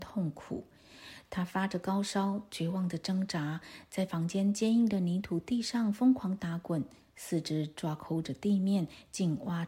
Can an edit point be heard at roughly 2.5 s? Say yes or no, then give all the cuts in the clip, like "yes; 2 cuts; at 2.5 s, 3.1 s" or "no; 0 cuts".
no; 0 cuts